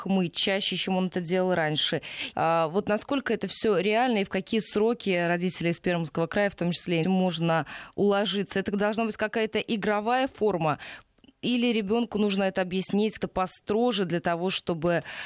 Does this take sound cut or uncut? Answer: cut